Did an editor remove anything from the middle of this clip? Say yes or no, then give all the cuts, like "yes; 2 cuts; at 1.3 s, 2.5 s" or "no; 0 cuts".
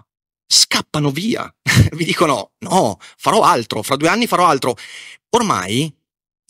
no; 0 cuts